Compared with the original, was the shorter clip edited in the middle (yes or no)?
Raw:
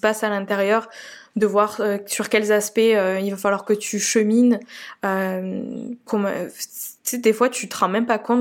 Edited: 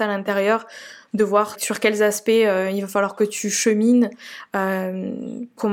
yes